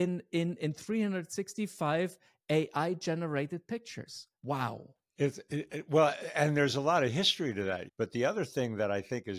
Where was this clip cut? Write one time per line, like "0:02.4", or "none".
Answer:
0:04.3
0:07.9